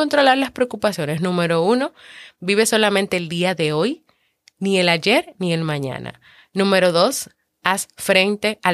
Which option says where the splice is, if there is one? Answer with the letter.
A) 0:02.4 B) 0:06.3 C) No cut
C